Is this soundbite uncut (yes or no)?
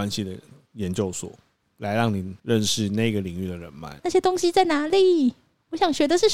no